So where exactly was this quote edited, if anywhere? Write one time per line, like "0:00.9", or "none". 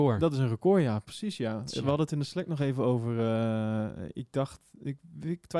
none